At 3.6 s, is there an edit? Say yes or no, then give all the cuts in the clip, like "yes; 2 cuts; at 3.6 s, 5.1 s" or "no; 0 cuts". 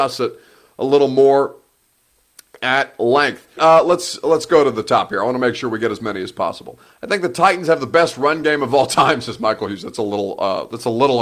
yes; 1 cut; at 3.6 s